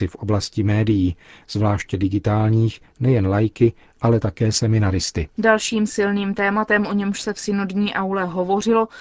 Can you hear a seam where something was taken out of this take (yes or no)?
yes